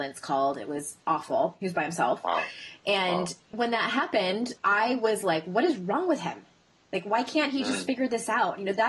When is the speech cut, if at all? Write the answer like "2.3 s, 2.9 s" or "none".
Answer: none